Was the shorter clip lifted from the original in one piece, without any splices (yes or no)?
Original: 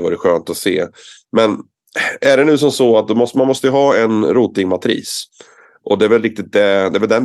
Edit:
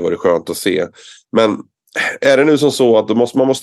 yes